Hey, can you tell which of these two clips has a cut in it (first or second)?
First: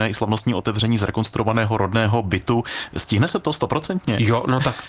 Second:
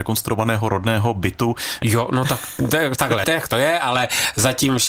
second